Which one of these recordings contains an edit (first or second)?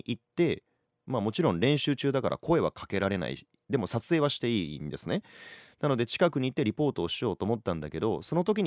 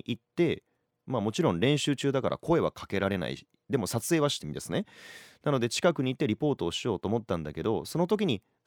second